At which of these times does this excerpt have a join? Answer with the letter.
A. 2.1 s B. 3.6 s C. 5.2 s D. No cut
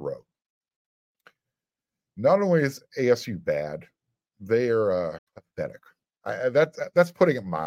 C